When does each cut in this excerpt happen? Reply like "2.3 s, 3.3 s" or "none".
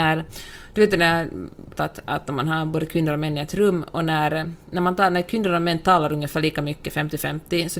1.7 s

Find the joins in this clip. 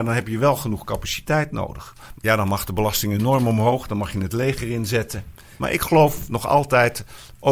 2.1 s, 5.6 s

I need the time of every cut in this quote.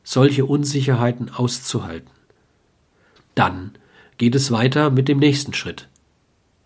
3.2 s

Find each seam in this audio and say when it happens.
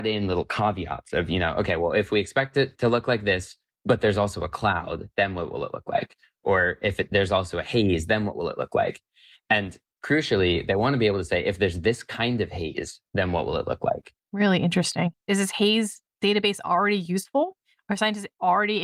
none

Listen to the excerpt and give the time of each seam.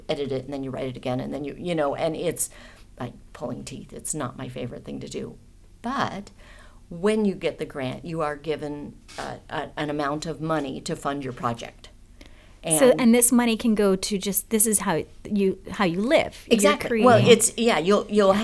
none

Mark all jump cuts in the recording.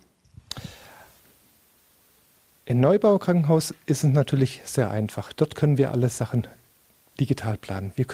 none

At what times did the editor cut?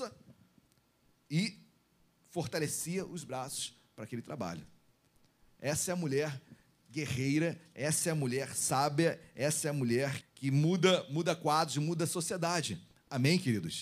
10.2 s

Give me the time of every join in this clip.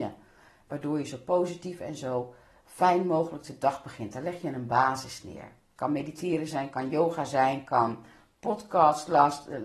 5.8 s

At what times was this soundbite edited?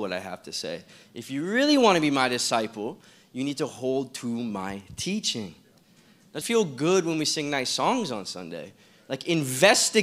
6.4 s

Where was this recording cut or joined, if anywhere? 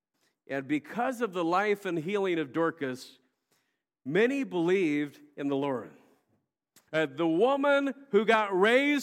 6.9 s

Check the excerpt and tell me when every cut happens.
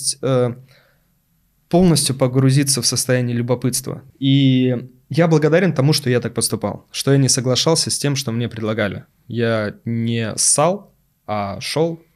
4.1 s

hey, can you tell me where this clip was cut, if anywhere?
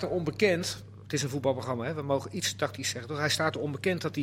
none

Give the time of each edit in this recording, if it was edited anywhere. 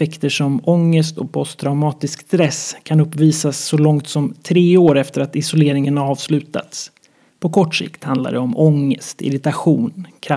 7.3 s

